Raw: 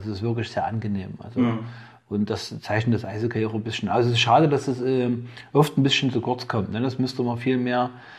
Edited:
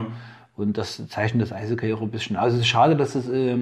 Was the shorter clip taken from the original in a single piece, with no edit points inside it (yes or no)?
yes